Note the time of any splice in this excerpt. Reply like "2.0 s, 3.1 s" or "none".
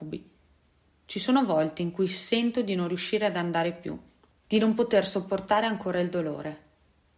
4.4 s